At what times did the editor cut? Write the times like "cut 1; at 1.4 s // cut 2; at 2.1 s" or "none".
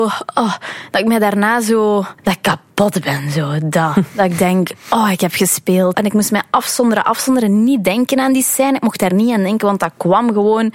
cut 1; at 2.2 s // cut 2; at 5.9 s